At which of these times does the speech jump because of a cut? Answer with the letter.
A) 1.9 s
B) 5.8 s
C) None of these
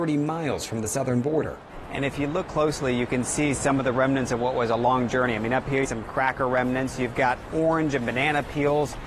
B